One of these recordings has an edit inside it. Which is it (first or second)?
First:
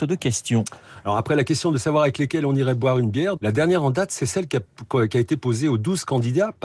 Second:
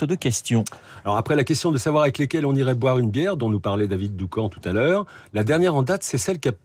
first